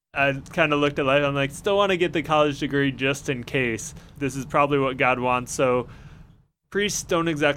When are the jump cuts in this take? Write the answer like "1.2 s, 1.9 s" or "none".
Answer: 4.2 s